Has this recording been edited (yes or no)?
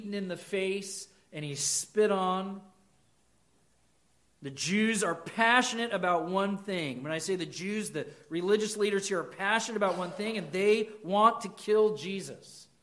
no